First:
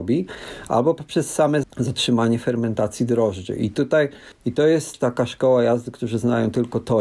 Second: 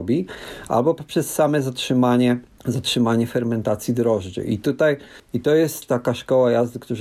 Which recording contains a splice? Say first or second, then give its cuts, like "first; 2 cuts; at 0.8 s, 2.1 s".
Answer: first; 1 cut; at 1.6 s